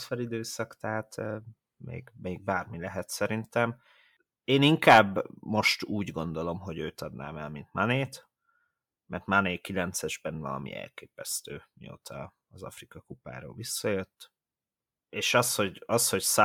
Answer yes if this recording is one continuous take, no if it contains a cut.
yes